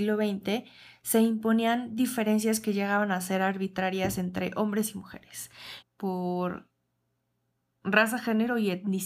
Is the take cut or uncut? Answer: cut